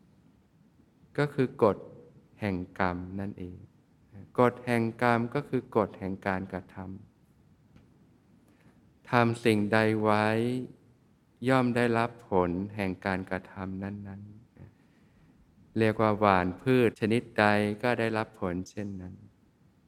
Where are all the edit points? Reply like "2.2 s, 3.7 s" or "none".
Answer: 4.3 s, 14.7 s, 16.9 s